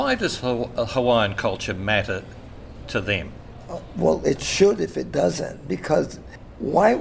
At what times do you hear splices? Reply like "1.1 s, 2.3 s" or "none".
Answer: none